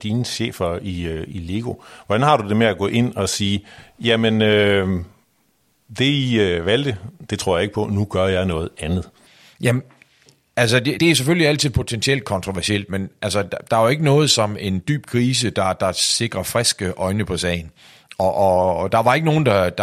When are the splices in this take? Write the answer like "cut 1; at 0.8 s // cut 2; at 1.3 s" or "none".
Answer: cut 1; at 11.0 s

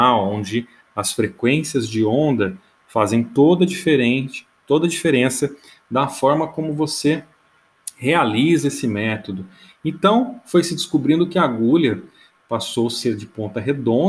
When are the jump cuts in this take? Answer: none

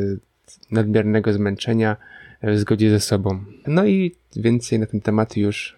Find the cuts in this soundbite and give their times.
cut 1; at 3.6 s

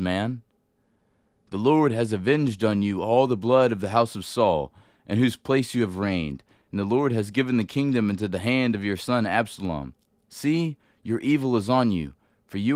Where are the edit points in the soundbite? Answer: none

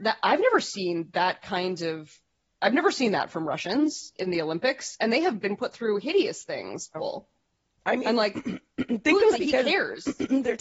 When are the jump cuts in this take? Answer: cut 1; at 6.9 s // cut 2; at 9.3 s

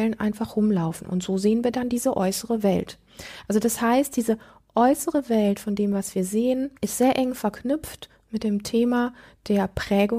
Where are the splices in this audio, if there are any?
cut 1; at 6.8 s

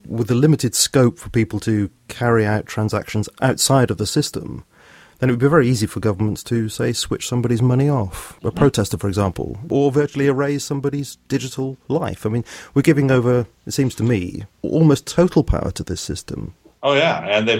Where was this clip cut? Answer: none

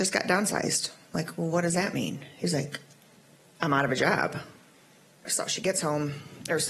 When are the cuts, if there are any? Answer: cut 1; at 5.3 s

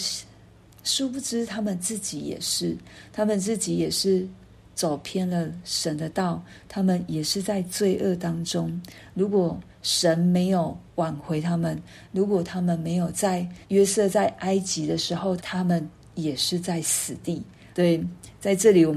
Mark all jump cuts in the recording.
cut 1; at 13.6 s // cut 2; at 15.4 s // cut 3; at 17.7 s

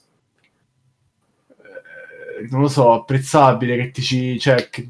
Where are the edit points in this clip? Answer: none

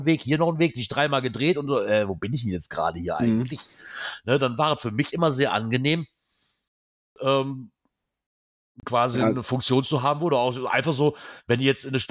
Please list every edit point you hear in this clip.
none

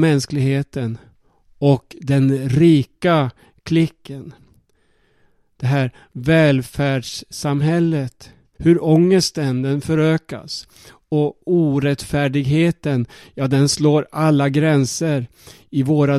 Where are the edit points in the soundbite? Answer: cut 1; at 8.6 s

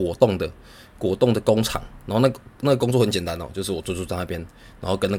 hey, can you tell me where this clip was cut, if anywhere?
none

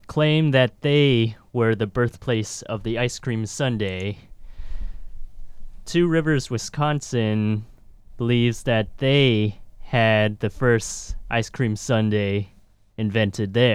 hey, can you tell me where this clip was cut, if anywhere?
none

